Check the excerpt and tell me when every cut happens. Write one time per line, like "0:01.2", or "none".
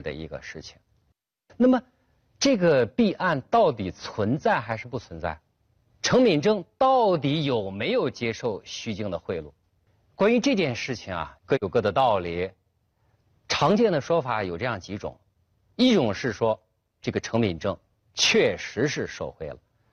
0:11.4